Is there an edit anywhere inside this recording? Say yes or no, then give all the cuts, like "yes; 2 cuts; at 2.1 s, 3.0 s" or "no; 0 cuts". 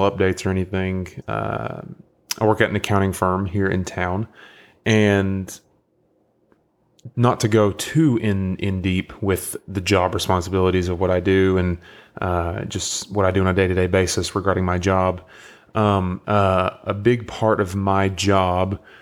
yes; 2 cuts; at 1.2 s, 16.2 s